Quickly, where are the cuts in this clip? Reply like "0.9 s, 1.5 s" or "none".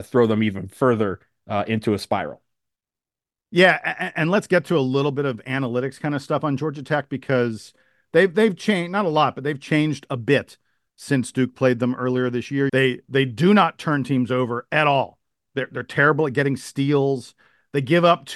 12.7 s, 15.5 s